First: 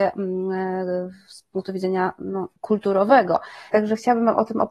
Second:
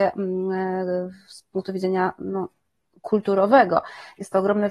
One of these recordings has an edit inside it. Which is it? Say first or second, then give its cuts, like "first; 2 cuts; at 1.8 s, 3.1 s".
first; 2 cuts; at 2.6 s, 3.7 s